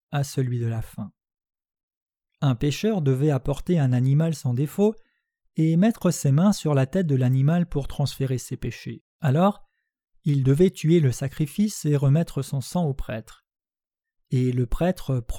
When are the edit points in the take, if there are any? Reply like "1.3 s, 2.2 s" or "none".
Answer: 2.2 s, 9.1 s